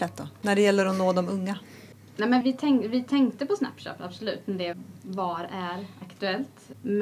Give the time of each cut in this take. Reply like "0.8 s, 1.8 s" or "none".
2.4 s